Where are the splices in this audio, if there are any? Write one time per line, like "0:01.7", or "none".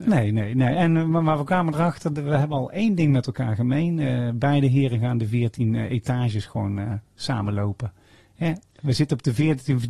none